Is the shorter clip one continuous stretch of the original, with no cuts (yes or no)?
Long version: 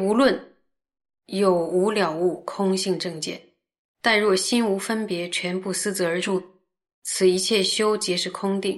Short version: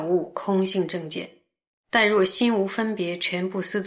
yes